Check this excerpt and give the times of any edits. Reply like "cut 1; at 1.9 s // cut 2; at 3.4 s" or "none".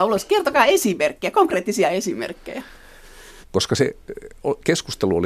cut 1; at 3.4 s